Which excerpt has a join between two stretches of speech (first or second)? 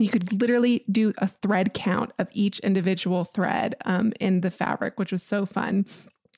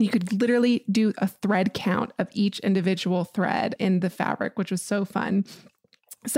second